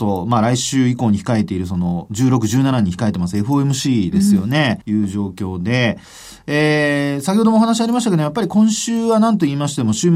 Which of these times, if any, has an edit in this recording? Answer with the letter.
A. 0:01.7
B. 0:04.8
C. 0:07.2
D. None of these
B